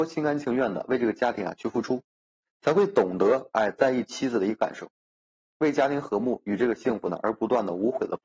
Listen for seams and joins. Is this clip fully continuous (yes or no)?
yes